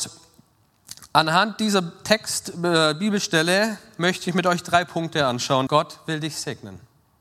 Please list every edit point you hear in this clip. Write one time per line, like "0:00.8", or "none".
0:05.7